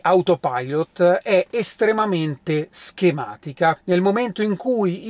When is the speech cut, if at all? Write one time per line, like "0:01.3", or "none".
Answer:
0:03.8